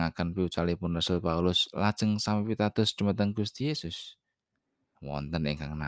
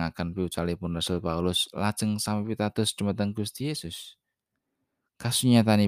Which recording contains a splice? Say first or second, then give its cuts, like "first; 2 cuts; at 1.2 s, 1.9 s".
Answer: first; 1 cut; at 4.9 s